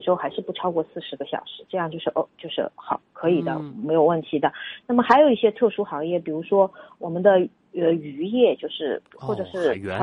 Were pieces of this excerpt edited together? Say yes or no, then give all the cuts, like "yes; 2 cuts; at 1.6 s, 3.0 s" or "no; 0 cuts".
no; 0 cuts